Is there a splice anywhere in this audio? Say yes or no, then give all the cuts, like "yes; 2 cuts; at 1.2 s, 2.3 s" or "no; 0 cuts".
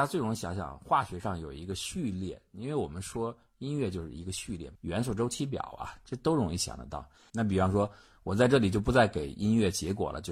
yes; 2 cuts; at 4.7 s, 7.3 s